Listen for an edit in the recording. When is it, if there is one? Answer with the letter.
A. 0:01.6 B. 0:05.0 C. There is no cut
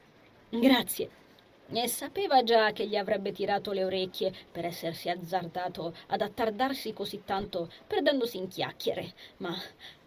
A